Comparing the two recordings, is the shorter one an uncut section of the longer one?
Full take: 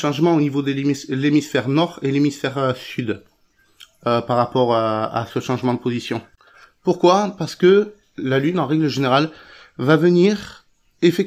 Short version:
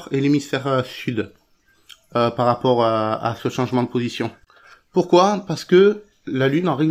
yes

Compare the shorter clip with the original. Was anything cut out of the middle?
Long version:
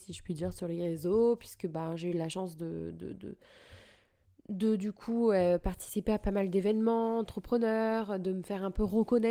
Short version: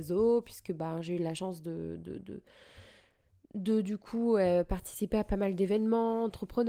no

